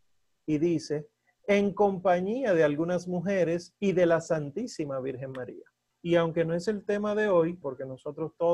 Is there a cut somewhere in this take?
yes; 2 cuts; at 5.9 s, 7.6 s

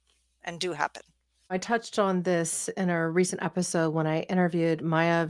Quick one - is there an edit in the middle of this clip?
no; 0 cuts

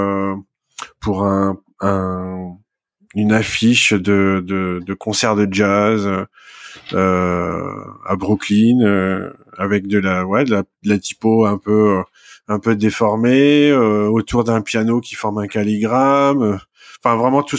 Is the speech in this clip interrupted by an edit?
no; 0 cuts

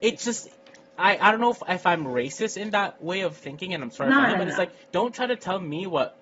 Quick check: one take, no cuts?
no; 1 cut; at 4.8 s

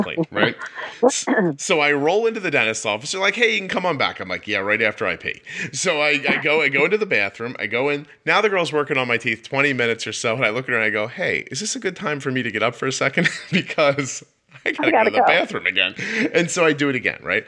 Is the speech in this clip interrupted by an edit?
no; 0 cuts

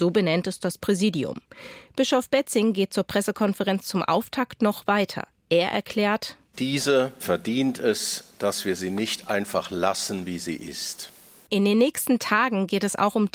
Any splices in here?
yes; 1 cut; at 7.2 s

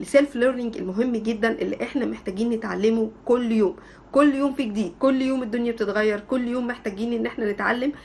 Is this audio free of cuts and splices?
no; 1 cut; at 5.0 s

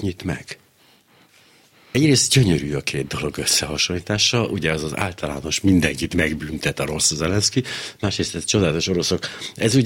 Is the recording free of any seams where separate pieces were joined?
yes; 0 cuts

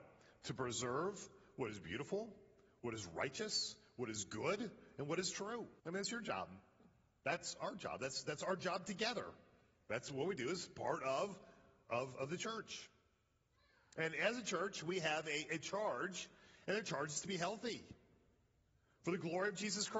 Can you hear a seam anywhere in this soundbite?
yes; 1 cut; at 5.8 s

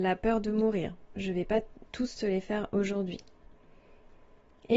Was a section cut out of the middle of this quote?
no; 0 cuts

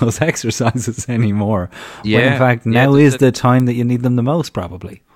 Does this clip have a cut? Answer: no; 0 cuts

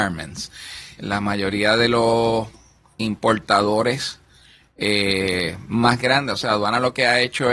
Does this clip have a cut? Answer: yes; 1 cut; at 1.0 s

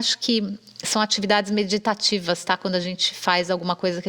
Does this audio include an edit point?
no; 0 cuts

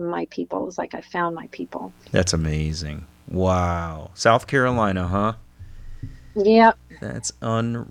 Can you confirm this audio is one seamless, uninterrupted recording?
yes; 0 cuts

